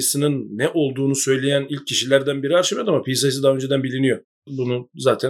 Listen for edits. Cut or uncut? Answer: cut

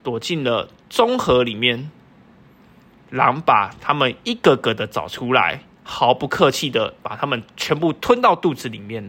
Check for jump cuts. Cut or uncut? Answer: uncut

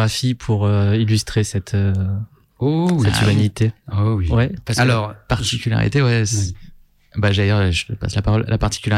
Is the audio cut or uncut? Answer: uncut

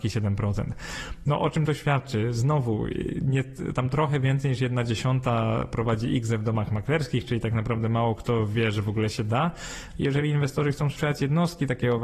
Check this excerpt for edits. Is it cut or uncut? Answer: cut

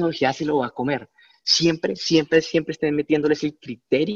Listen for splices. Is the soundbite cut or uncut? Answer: uncut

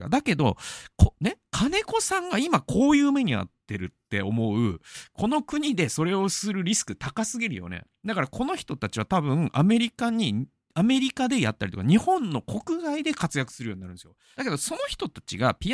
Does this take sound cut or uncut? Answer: cut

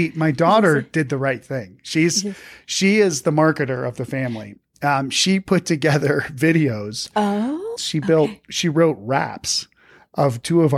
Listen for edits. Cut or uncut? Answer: cut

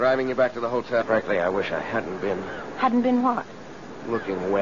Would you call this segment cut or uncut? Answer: cut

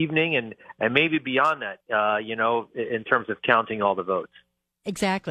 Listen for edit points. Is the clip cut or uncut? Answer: uncut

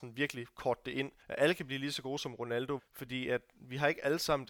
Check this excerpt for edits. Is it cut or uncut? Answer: cut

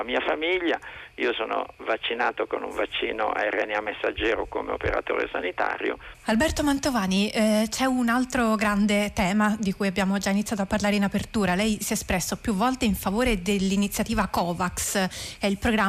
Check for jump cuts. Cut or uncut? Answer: cut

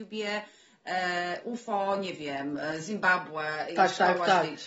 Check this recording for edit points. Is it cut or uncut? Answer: uncut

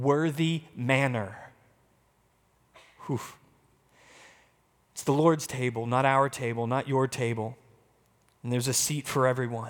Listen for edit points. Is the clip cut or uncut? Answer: uncut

